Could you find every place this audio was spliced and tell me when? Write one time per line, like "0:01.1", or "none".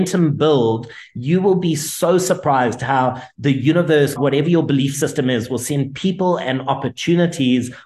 0:04.2